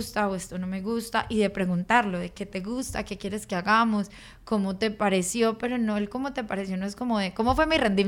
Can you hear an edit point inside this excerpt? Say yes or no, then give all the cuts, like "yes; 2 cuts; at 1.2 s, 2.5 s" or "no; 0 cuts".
no; 0 cuts